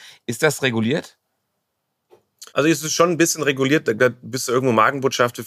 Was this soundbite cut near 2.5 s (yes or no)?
yes